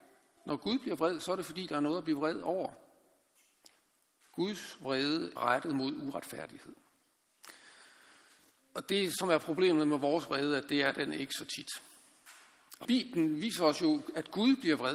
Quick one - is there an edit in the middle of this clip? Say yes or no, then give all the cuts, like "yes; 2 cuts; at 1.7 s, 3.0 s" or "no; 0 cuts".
yes; 2 cuts; at 5.4 s, 12.8 s